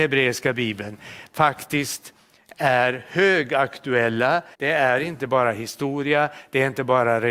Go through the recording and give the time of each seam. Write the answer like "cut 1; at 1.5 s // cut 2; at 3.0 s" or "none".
cut 1; at 4.5 s